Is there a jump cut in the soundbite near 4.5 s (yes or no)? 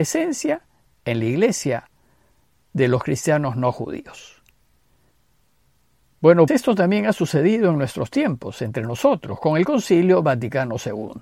no